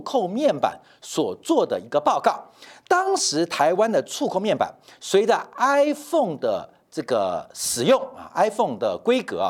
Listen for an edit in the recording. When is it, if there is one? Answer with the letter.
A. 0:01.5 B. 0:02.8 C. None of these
C